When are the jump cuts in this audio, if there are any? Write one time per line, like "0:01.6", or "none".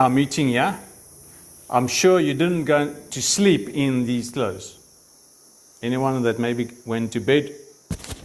none